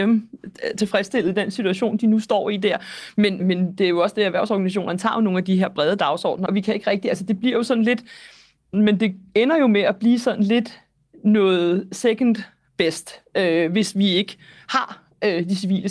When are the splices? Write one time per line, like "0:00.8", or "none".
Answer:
0:03.4
0:06.5
0:08.7